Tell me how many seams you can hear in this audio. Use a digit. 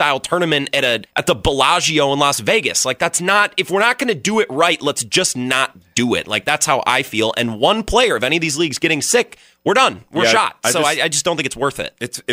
1